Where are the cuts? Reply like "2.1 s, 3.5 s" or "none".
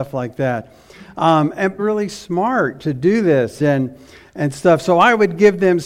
1.8 s, 3.6 s